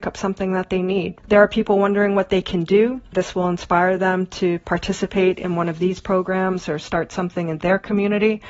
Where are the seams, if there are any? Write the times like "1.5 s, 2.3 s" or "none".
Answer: 1.2 s, 3.1 s